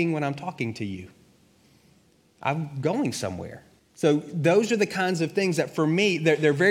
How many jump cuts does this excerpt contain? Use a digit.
1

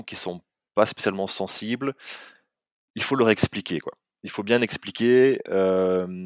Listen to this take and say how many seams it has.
0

